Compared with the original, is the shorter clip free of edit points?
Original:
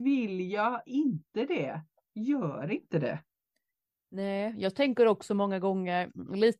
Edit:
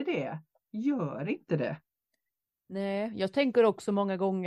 yes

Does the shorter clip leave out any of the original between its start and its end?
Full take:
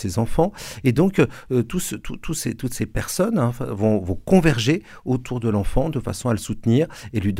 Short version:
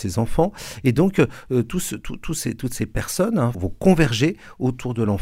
yes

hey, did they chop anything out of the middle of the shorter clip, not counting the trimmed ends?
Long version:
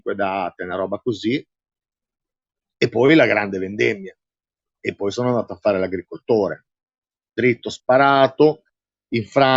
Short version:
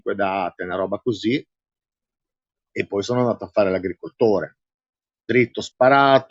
yes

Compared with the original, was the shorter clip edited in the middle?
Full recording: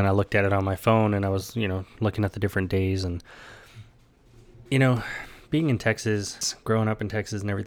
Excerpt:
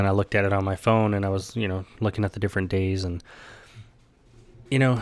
no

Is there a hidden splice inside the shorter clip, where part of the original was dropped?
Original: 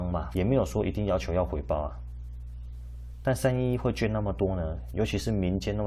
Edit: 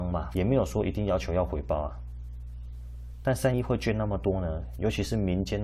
yes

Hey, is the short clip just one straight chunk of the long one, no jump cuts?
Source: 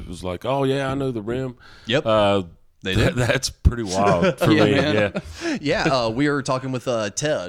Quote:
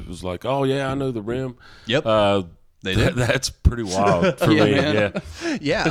yes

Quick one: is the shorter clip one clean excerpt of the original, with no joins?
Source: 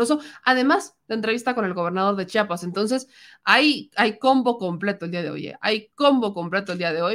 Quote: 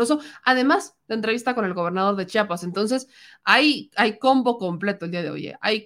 yes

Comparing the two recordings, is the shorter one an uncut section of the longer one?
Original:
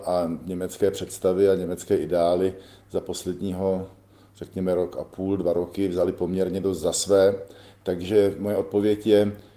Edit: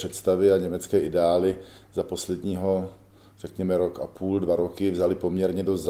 yes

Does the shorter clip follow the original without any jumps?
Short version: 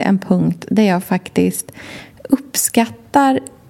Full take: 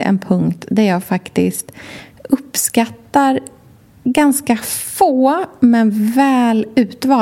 yes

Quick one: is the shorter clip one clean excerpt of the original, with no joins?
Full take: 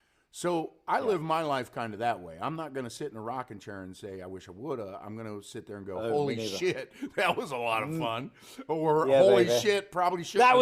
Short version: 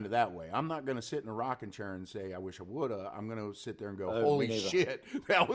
yes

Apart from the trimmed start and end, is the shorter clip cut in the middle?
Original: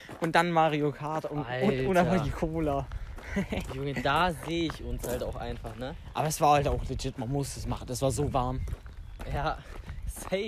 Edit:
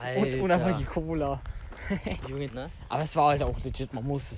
yes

